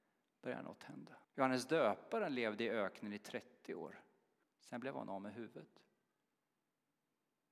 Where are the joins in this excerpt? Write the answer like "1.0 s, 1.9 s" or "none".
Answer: 1.2 s, 4.4 s